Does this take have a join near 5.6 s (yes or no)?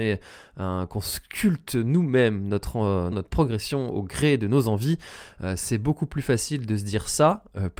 no